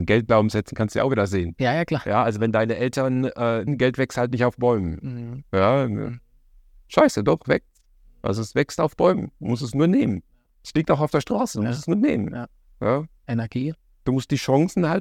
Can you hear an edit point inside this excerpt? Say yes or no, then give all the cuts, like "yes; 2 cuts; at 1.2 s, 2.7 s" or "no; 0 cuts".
yes; 1 cut; at 3.7 s